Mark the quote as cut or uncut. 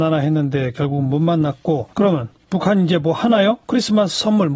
cut